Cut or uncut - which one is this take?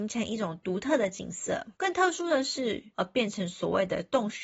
cut